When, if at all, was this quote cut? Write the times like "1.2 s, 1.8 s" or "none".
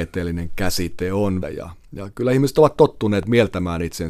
1.4 s